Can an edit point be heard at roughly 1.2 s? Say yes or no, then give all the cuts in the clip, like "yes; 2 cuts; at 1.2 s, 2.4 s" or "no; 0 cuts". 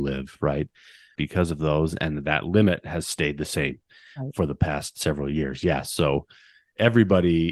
yes; 1 cut; at 1.2 s